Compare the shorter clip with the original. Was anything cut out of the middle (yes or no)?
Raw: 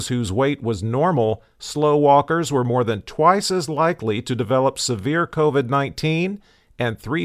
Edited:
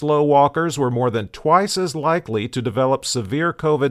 no